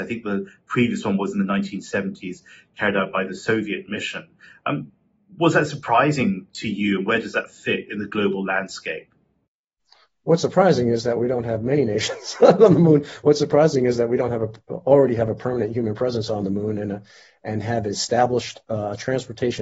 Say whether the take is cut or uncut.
uncut